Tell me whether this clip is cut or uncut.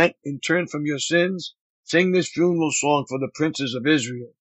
cut